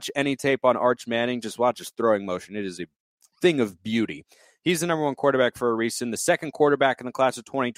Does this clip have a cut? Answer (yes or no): no